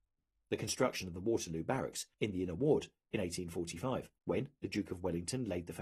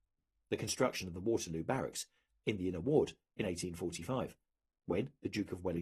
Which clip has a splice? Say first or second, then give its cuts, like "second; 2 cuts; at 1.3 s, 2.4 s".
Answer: first; 2 cuts; at 2.1 s, 4.2 s